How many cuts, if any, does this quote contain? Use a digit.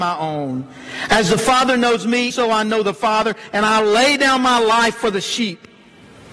1